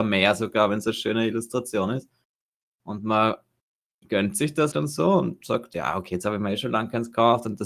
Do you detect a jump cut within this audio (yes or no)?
yes